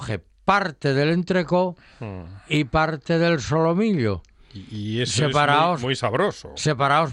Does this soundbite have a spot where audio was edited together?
no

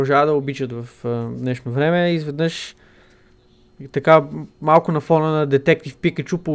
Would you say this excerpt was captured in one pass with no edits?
yes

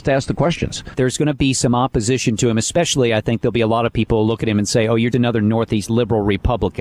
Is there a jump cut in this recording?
yes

